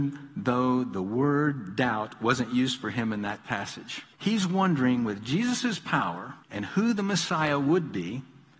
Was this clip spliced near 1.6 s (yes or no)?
no